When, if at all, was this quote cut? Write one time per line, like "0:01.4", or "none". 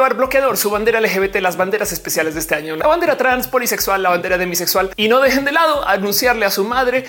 none